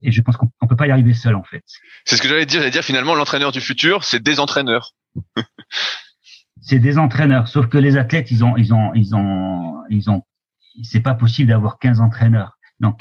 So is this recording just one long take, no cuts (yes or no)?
yes